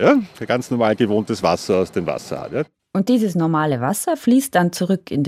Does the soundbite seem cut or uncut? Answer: uncut